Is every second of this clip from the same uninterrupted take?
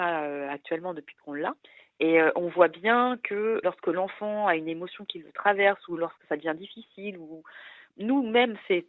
yes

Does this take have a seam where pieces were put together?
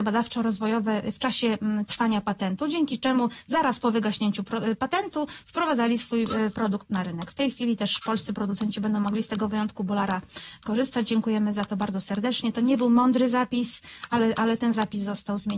no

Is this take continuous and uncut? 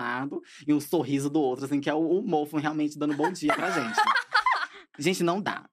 yes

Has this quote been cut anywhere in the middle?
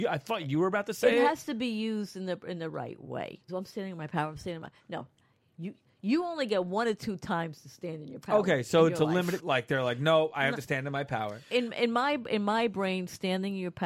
yes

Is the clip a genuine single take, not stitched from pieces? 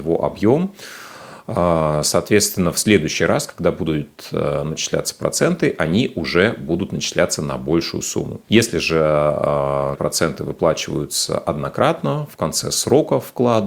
no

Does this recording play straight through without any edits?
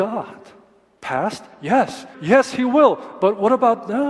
no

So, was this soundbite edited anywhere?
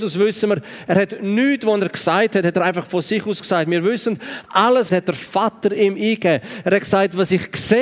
yes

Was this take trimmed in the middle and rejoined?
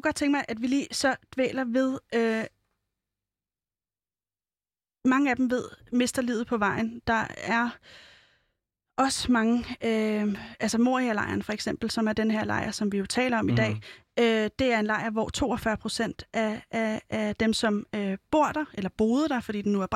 no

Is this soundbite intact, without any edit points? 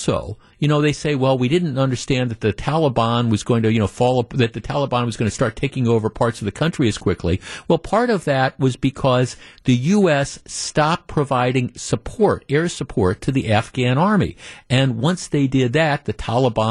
yes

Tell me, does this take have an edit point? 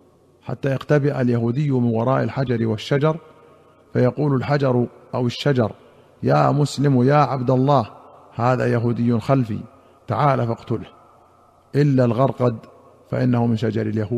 no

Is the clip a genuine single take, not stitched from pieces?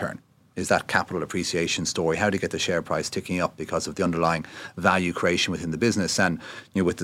yes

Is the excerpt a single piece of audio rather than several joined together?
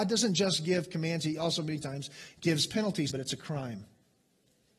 no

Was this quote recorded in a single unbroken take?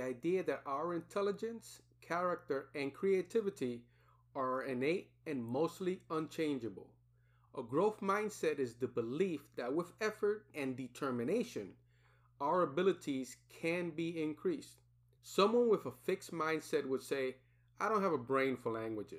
no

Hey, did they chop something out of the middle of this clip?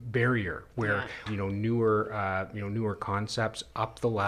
yes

